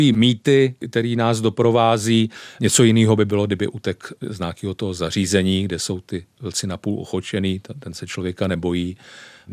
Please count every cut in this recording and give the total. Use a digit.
1